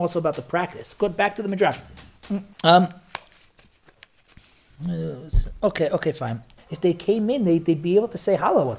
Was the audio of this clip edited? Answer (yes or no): yes